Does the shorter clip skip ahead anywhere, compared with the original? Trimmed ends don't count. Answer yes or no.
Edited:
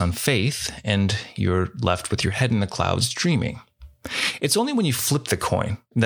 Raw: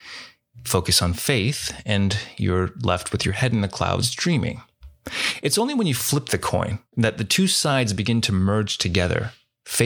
no